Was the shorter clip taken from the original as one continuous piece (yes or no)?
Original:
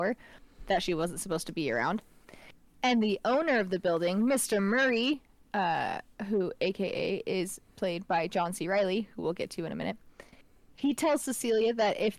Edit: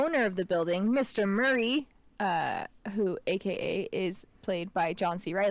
yes